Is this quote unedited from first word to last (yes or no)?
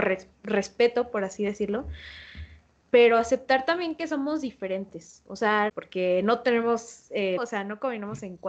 no